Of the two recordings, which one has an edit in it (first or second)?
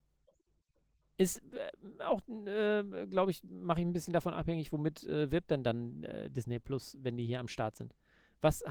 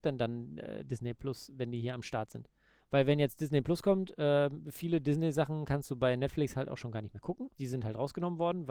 second